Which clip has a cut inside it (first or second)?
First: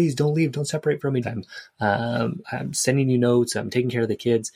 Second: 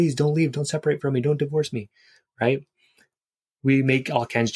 first